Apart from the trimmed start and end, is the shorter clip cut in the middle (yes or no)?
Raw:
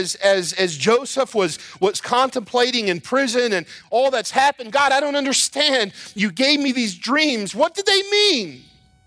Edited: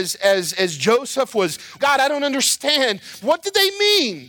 yes